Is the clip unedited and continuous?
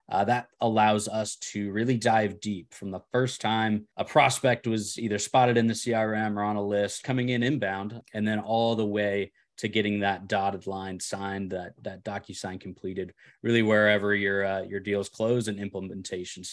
no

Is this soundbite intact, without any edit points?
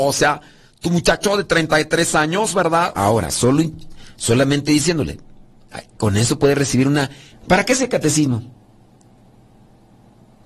no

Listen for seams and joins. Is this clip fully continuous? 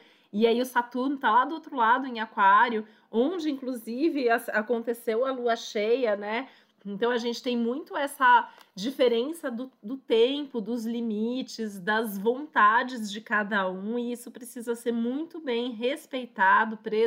yes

